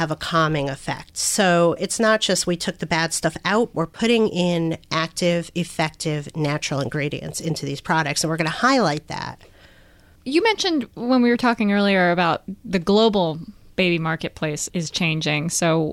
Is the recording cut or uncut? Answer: uncut